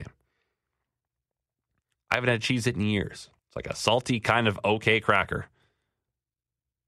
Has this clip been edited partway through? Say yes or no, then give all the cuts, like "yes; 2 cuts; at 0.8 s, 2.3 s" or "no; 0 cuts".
yes; 2 cuts; at 1.9 s, 3.4 s